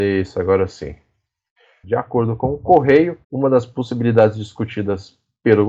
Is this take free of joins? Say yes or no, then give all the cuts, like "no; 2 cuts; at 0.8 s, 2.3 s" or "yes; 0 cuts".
no; 2 cuts; at 1.8 s, 3.2 s